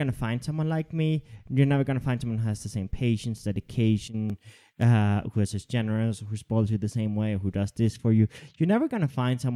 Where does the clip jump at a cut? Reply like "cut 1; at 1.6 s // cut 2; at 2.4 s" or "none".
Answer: none